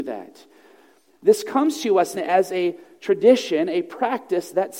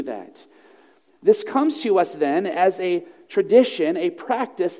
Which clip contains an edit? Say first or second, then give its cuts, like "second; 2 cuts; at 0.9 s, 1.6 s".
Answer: first; 1 cut; at 2.1 s